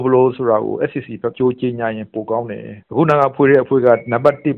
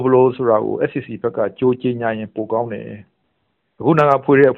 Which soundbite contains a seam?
first; 2 cuts; at 1.3 s, 2.8 s

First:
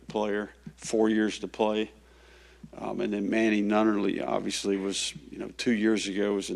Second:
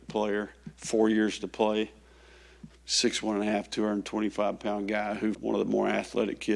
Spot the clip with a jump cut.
second; 2 cuts; at 2.7 s, 5.3 s

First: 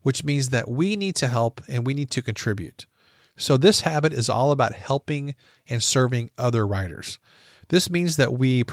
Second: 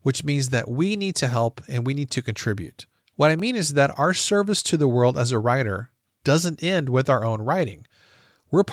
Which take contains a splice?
second; 1 cut; at 3.0 s

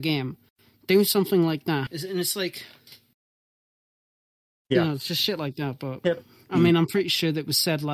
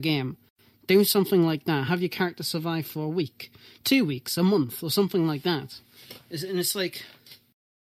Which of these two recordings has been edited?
first; 1 cut; at 1.9 s

